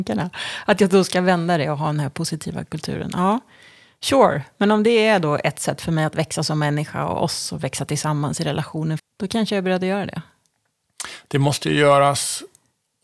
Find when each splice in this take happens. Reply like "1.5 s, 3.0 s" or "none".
9.0 s